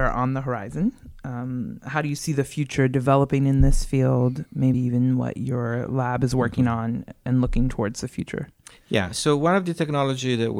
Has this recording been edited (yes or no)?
no